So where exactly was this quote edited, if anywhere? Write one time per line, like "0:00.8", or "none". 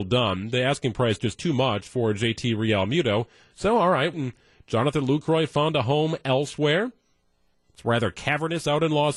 0:04.1
0:07.5